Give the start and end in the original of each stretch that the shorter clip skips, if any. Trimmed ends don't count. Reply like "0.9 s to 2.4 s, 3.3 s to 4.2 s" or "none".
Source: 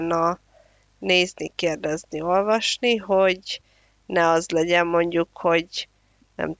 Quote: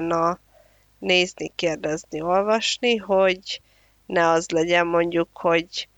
none